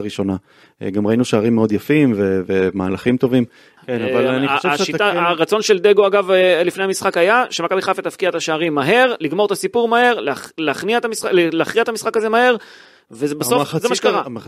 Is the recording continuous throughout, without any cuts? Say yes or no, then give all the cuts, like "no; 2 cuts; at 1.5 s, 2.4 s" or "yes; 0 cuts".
no; 1 cut; at 3.8 s